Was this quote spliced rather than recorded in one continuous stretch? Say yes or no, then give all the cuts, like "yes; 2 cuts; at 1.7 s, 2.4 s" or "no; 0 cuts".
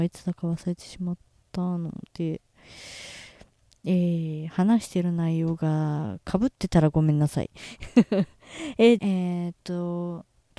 yes; 1 cut; at 9.0 s